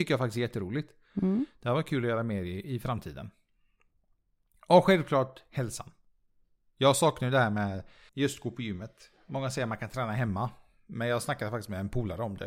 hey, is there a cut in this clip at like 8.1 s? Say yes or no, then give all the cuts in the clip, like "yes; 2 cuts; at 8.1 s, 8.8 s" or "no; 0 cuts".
yes; 1 cut; at 8.1 s